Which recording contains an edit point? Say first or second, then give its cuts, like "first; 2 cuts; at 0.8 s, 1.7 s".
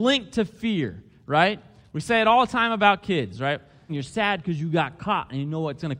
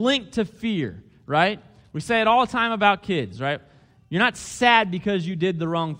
first; 1 cut; at 3.9 s